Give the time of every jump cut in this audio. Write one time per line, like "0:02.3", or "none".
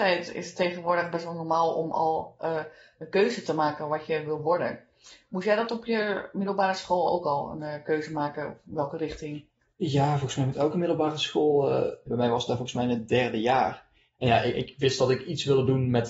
0:12.1